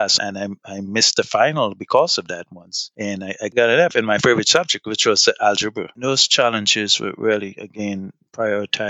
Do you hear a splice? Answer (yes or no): no